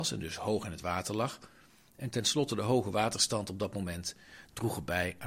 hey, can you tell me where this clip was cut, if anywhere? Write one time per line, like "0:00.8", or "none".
none